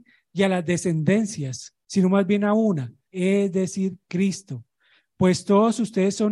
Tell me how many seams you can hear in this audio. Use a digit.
2